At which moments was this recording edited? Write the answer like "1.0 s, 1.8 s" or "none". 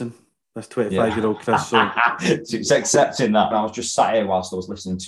3.5 s